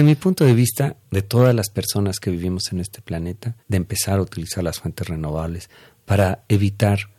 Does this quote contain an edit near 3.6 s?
yes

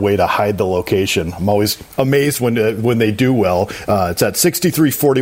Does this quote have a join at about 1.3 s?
no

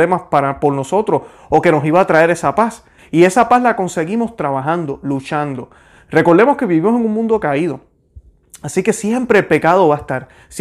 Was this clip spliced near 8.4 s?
no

